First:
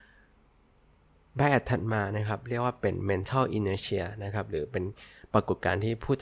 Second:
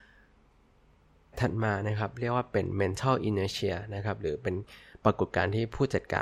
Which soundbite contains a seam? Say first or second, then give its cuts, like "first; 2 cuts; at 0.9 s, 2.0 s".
second; 1 cut; at 1.3 s